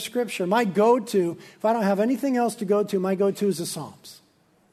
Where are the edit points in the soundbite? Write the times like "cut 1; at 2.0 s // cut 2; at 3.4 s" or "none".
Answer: none